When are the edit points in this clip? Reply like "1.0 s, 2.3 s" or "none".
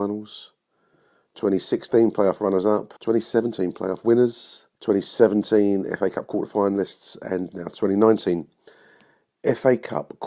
3.0 s, 4.7 s